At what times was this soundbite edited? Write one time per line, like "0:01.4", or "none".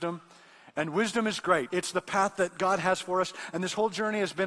0:01.7